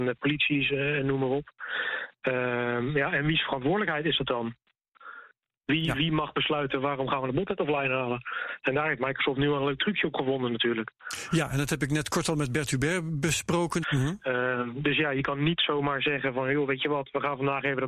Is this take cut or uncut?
cut